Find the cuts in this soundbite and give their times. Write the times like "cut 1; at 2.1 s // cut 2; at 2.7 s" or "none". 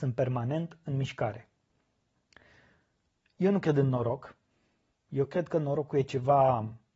none